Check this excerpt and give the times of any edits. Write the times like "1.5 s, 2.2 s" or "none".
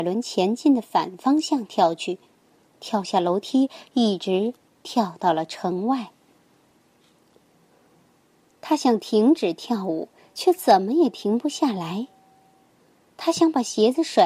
3.9 s